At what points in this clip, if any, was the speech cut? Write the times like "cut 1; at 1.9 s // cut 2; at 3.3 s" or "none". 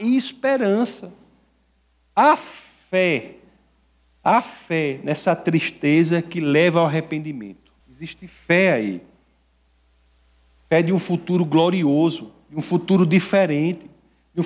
cut 1; at 7.8 s